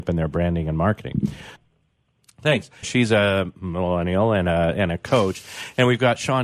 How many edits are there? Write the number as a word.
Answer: two